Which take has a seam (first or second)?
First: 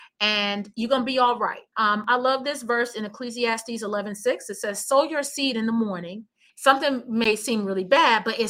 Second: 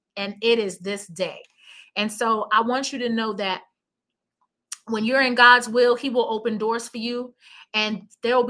first